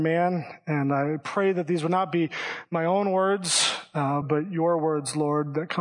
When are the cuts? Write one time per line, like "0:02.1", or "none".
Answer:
0:04.2